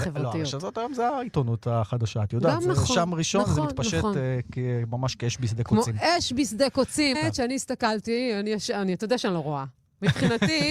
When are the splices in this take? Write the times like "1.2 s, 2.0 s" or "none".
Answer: 7.1 s

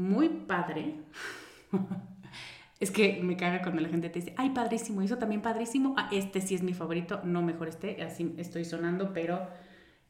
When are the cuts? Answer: none

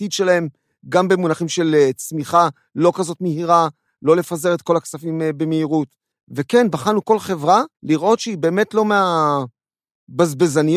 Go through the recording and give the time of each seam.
6.1 s, 7.7 s

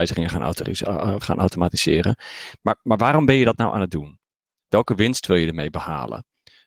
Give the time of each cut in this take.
1.2 s

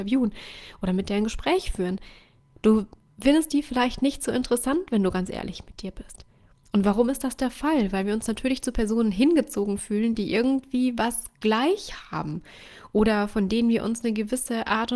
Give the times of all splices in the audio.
none

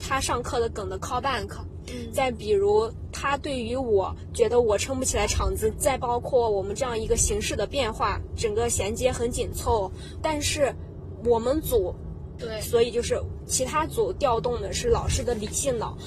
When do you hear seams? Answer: 5.7 s, 10.2 s, 12.4 s

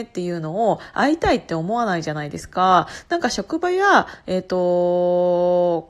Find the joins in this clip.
none

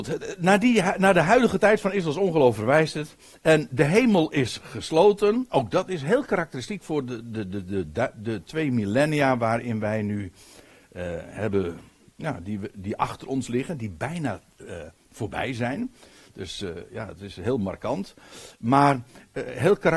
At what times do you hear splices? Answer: none

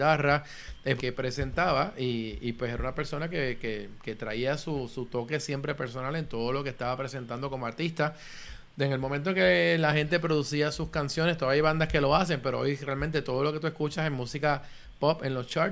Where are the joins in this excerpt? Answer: 1.0 s

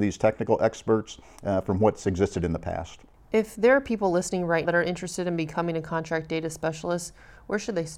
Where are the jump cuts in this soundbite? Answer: 4.6 s

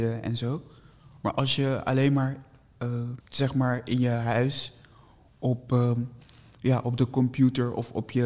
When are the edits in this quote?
3.2 s

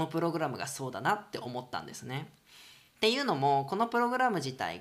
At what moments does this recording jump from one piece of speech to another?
none

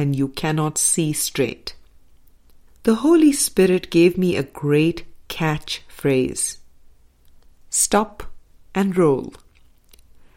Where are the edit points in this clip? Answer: 2.7 s, 8.7 s

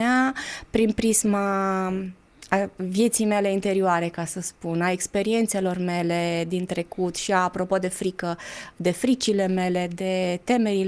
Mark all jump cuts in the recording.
none

